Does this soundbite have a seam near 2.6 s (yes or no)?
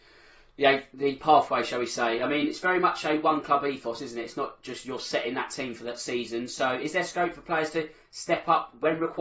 no